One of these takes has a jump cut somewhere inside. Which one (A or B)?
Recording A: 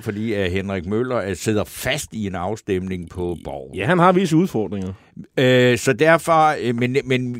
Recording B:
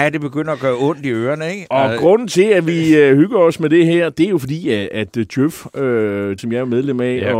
B